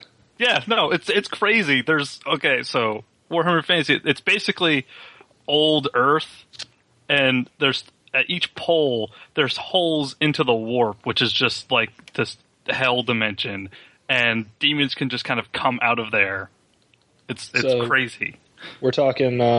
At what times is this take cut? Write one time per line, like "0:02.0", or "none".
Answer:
none